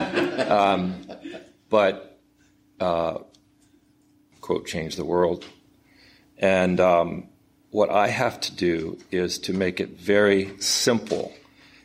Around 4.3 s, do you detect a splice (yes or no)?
yes